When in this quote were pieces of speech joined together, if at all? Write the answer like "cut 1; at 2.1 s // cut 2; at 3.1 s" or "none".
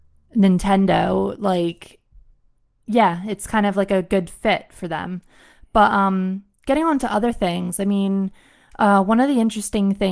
none